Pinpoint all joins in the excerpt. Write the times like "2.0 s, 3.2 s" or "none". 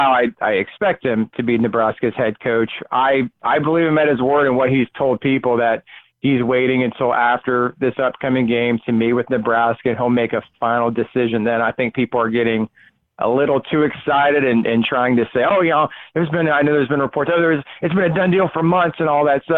none

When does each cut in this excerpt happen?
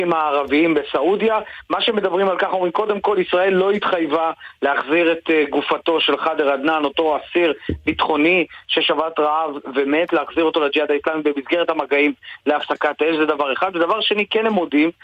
none

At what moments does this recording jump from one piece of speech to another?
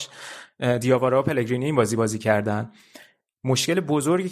none

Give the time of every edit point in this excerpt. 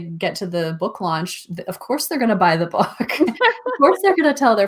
none

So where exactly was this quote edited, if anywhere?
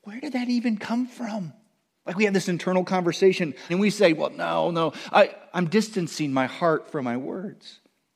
3.7 s

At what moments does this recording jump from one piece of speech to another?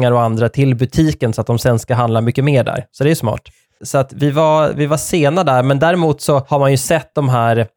3.8 s

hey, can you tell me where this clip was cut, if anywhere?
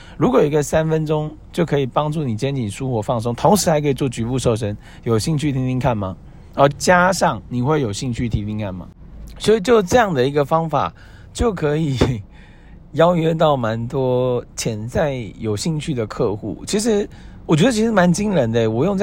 6.7 s

